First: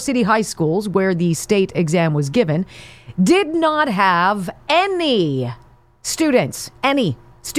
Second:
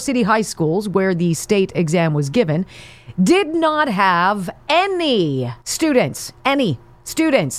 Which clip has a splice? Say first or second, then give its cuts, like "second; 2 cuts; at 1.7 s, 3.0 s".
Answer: second; 1 cut; at 5.6 s